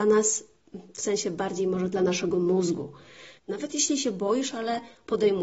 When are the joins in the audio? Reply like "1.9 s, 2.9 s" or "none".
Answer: 3.4 s